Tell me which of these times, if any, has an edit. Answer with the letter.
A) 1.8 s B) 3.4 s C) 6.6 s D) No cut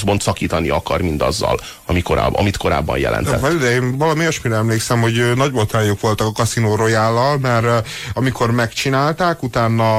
D